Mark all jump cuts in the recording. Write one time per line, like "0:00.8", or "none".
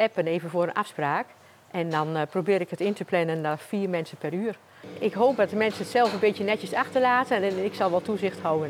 none